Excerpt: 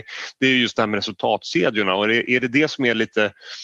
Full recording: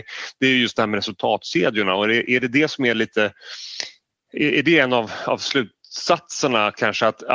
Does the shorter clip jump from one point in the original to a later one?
no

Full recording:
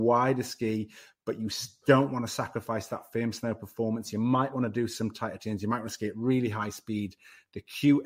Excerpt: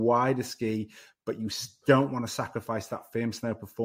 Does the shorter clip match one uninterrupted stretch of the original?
yes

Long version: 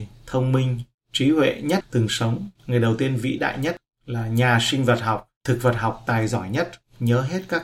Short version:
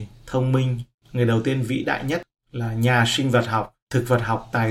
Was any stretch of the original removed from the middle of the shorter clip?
yes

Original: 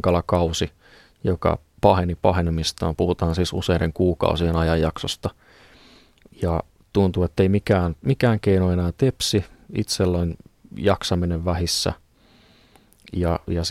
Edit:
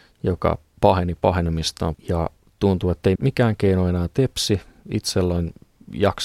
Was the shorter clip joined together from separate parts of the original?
yes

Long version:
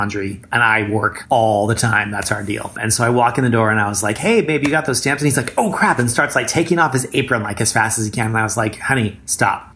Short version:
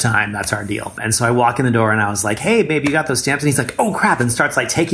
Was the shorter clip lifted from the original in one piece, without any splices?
yes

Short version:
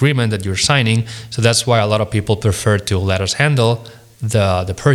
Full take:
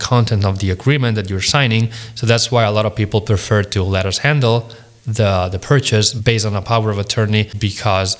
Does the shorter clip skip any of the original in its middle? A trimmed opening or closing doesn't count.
no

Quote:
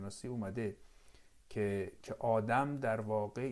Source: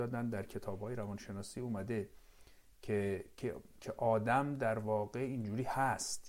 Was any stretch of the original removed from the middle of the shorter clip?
yes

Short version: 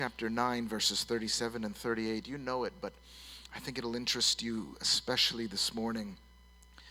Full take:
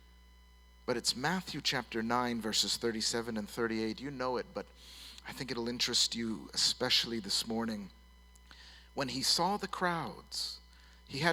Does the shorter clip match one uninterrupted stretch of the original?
yes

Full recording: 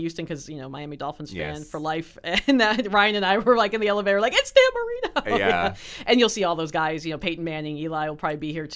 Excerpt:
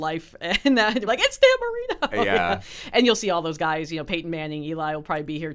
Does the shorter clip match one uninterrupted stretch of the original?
no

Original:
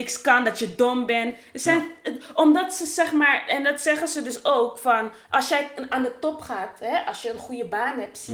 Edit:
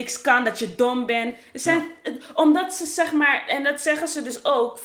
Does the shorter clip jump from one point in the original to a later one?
no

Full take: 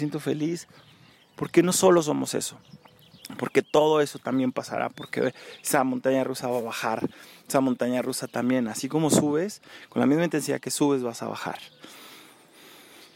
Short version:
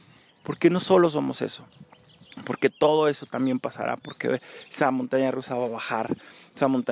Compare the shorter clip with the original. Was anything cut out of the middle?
no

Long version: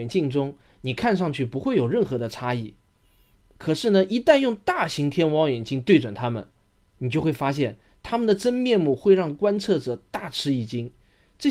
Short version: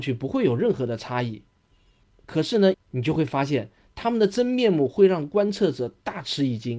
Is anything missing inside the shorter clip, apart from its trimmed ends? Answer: yes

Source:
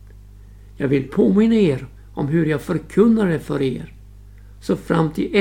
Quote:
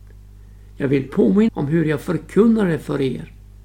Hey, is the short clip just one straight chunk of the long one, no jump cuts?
no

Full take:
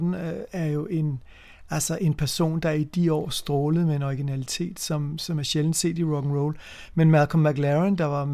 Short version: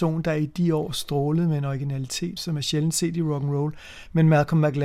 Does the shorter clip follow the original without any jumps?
no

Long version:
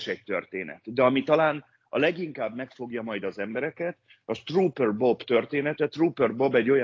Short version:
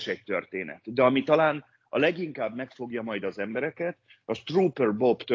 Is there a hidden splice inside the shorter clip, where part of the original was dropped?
no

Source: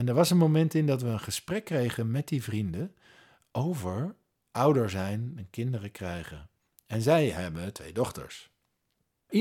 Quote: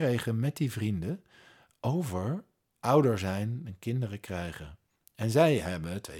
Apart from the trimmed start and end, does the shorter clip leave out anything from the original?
no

